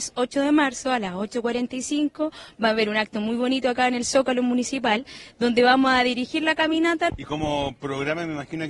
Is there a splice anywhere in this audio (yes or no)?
yes